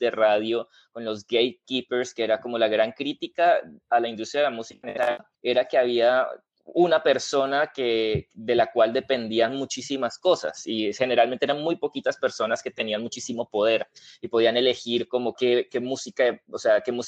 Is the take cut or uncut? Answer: cut